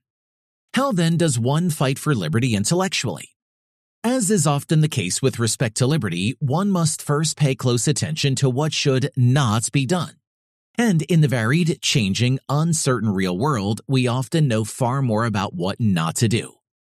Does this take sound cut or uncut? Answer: uncut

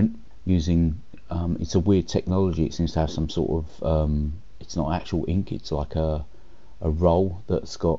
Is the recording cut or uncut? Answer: uncut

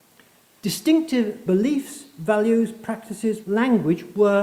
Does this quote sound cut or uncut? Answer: cut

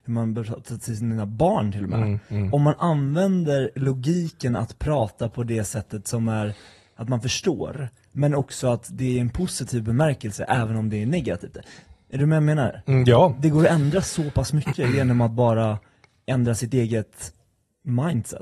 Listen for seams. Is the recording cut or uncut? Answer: uncut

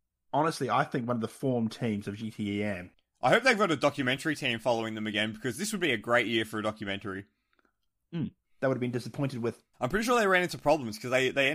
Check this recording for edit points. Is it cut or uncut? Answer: cut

